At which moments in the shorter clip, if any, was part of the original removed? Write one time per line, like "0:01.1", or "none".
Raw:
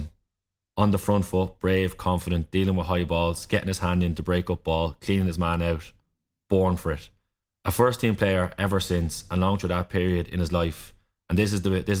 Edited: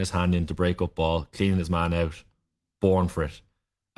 none

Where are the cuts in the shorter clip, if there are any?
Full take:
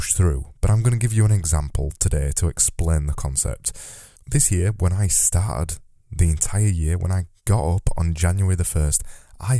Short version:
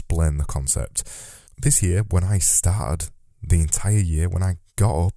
none

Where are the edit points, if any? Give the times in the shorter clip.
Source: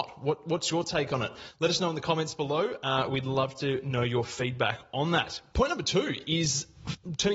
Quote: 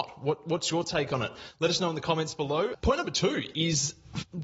0:02.7

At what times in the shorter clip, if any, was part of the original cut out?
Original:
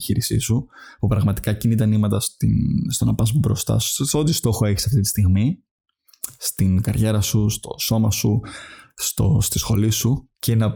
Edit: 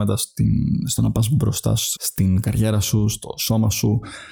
0:02.0

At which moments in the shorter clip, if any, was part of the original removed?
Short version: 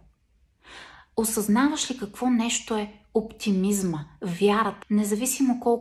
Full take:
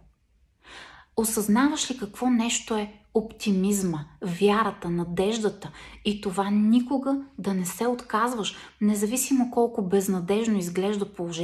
0:04.8

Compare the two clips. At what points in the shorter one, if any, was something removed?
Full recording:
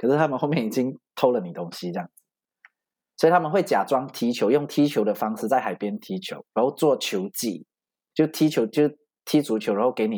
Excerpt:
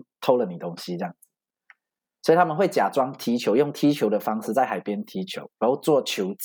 none

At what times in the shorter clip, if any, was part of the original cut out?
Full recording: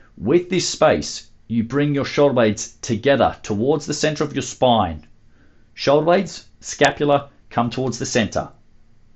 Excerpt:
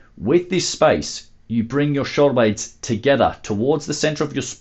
none

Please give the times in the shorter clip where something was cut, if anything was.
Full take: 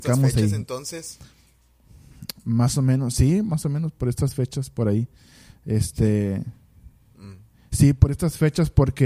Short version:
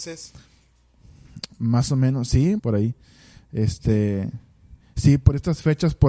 0:02.6
0:04.8

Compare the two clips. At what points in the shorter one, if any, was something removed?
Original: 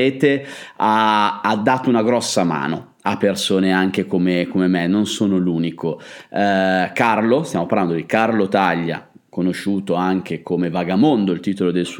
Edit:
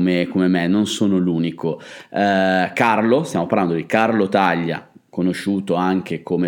none

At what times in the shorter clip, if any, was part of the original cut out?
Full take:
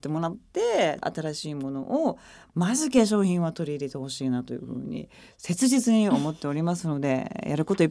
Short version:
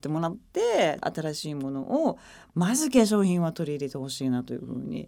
none

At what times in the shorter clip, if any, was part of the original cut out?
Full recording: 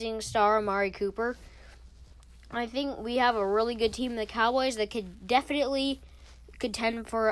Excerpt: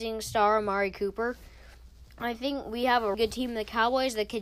0:02.1
0:03.1

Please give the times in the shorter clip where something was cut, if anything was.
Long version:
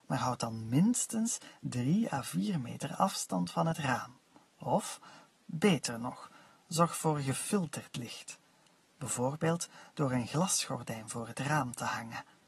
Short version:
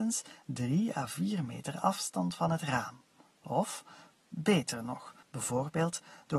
0:05.2

